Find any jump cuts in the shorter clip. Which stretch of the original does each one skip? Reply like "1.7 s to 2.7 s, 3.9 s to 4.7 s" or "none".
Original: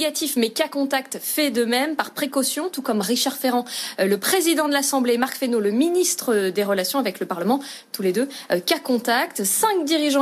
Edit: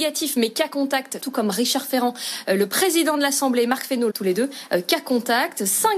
1.2 s to 2.7 s, 5.6 s to 7.9 s